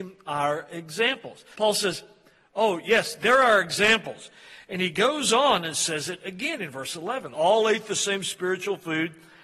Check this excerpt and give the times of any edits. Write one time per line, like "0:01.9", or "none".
0:01.5
0:07.3